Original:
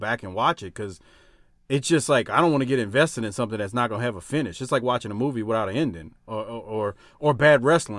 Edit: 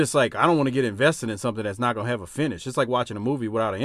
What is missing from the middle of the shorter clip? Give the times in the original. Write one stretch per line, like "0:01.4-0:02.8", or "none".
none